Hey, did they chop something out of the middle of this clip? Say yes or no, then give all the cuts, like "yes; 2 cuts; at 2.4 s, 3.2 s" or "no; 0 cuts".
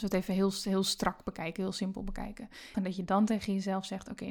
yes; 1 cut; at 2.7 s